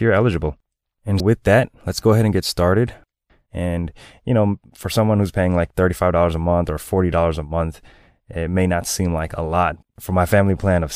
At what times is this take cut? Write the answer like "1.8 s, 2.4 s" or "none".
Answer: 1.2 s, 3.5 s, 9.8 s